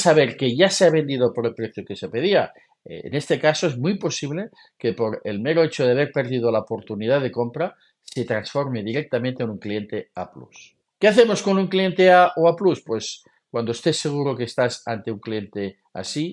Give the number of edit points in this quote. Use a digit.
0